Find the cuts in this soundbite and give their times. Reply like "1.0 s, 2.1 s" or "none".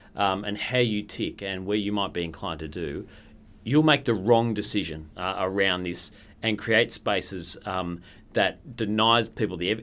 5.1 s

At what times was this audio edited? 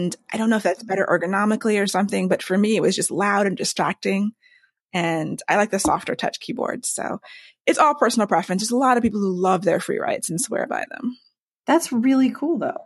none

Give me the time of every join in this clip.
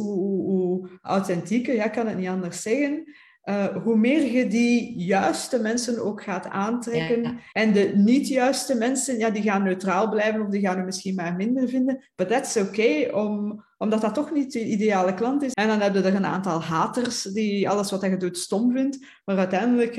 7.5 s, 15.5 s

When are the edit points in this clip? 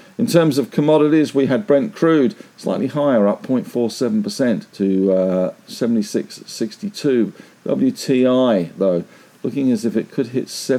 4.7 s

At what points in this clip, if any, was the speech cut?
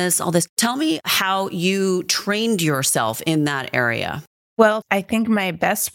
4.8 s

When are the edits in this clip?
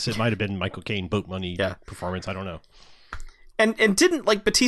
none

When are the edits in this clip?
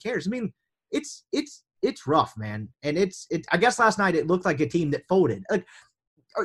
3.5 s

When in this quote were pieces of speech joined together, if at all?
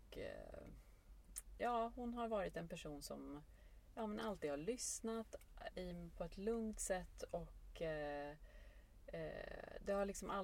none

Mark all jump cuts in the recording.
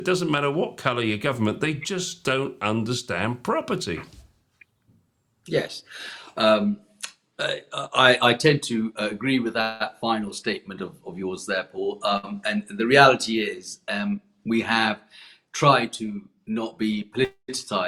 none

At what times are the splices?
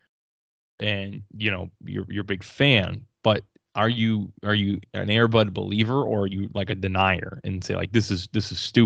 none

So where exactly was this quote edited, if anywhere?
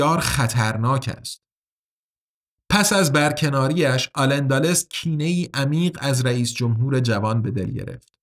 none

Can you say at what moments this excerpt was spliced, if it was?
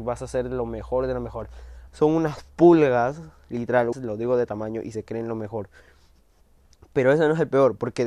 1.9 s, 3.9 s

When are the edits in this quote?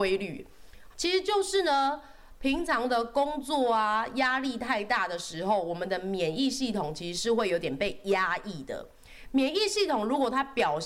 0.9 s

